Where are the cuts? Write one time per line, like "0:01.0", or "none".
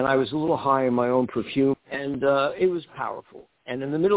0:01.7

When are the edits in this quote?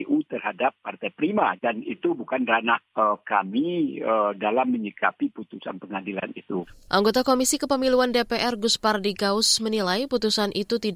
0:01.6

